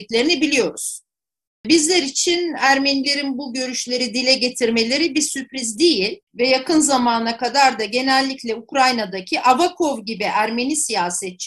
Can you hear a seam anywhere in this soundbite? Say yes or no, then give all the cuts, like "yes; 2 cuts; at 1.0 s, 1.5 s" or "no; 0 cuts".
yes; 1 cut; at 6.2 s